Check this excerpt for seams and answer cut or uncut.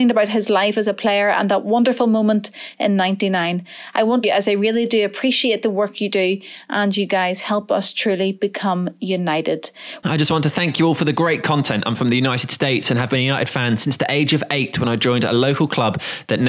cut